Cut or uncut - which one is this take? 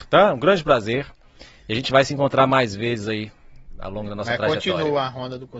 uncut